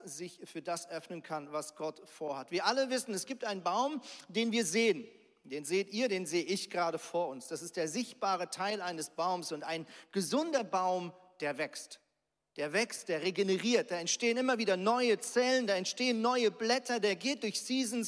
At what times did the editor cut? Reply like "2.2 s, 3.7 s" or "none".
none